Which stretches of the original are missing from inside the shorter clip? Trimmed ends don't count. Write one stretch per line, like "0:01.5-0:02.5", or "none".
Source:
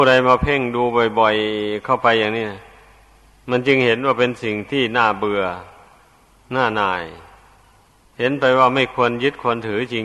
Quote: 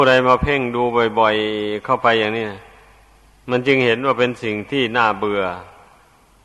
none